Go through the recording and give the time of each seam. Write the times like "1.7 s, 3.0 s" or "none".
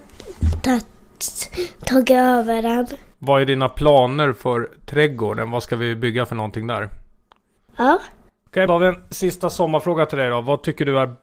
3.1 s, 7.6 s, 8.7 s